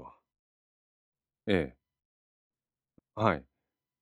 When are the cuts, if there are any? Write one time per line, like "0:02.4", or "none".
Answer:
0:03.0